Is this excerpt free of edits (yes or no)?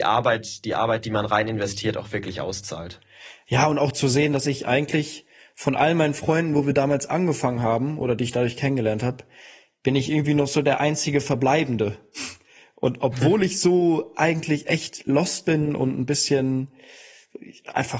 yes